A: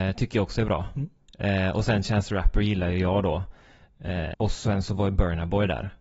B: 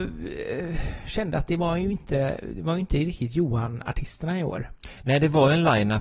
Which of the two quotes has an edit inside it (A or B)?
A